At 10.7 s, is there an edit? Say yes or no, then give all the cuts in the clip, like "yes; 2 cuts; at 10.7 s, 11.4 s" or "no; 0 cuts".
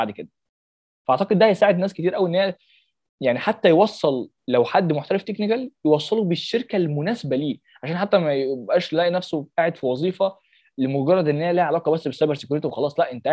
no; 1 cut; at 4.4 s